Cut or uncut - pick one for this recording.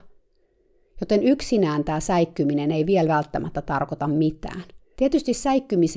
cut